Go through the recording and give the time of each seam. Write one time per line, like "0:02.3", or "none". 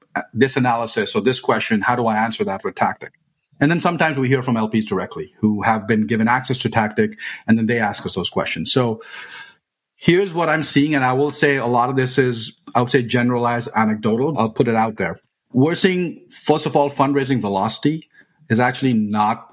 0:14.3